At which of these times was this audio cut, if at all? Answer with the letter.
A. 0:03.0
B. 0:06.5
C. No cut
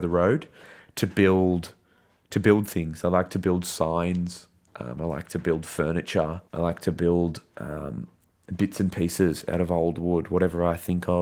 B